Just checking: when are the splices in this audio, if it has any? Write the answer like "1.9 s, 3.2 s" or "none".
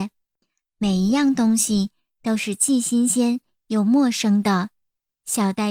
none